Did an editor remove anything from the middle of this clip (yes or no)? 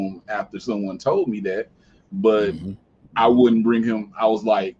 no